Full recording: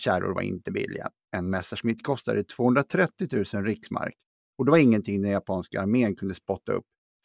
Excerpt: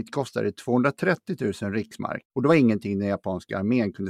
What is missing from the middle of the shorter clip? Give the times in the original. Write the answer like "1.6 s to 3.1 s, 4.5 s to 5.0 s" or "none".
4.2 s to 4.5 s